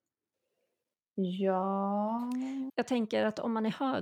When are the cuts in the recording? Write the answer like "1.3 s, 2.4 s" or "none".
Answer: 1.1 s, 2.7 s